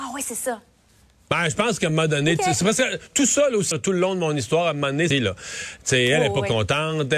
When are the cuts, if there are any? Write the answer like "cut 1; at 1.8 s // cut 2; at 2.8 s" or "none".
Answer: cut 1; at 3.7 s // cut 2; at 5.1 s